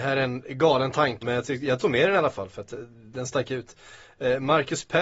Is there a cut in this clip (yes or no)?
yes